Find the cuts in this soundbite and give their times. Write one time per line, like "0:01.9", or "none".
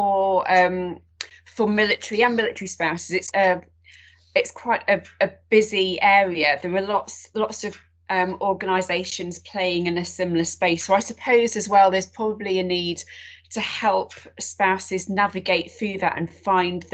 0:03.3